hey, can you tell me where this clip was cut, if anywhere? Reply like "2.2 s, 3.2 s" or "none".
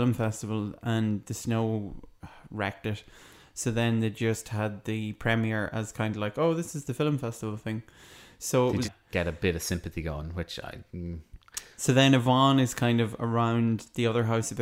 8.8 s